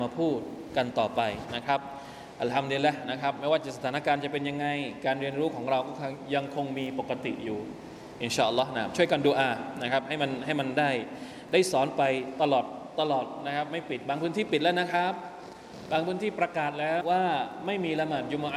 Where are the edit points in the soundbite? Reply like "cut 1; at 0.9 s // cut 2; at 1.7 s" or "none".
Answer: cut 1; at 17.0 s